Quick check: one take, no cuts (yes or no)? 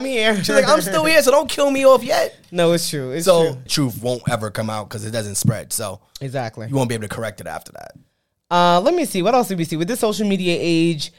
no